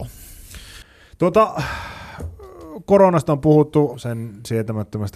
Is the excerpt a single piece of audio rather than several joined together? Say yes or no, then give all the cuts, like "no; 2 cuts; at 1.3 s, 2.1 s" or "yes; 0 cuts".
no; 1 cut; at 3.9 s